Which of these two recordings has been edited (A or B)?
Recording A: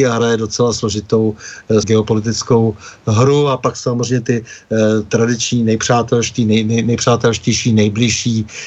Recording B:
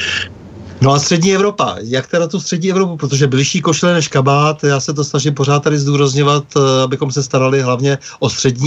A